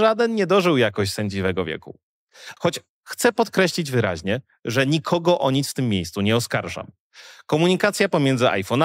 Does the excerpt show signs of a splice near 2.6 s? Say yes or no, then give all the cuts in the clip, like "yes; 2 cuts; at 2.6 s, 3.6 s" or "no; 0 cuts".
yes; 1 cut; at 2.6 s